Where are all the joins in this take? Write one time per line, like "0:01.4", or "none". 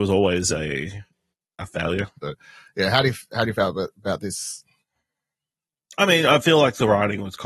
0:02.2